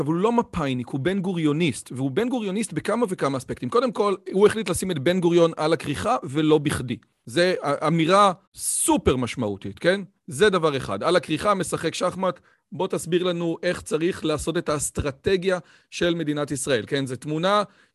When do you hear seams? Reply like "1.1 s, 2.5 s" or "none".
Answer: 8.4 s